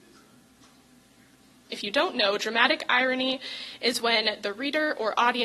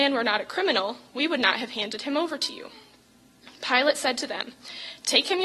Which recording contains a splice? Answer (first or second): first